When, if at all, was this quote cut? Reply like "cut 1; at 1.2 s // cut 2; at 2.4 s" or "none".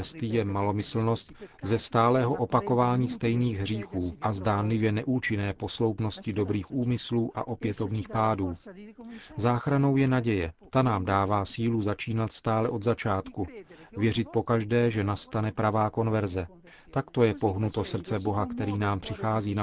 none